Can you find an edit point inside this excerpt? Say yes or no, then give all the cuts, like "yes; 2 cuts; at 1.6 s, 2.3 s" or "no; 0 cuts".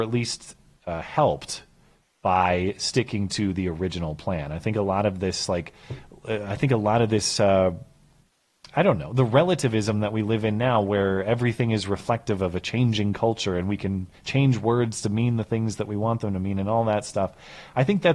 no; 0 cuts